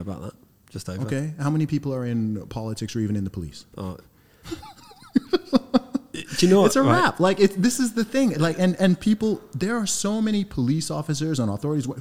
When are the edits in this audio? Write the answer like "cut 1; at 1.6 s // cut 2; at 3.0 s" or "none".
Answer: cut 1; at 3.7 s